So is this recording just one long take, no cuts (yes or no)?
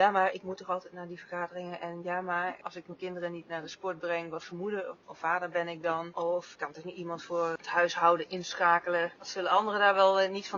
yes